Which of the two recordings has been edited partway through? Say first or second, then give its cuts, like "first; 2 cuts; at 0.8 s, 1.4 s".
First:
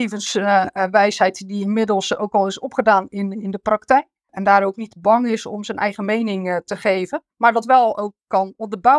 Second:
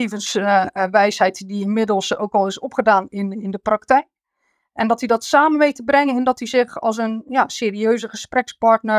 first; 2 cuts; at 4.3 s, 7.3 s